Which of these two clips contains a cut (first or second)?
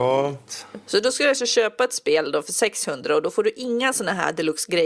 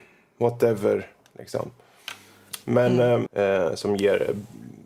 second